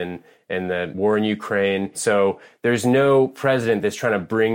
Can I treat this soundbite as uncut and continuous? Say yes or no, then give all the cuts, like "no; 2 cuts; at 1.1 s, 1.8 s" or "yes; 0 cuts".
no; 1 cut; at 1.9 s